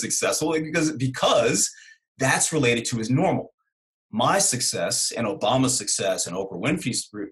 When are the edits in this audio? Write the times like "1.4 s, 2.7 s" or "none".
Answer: none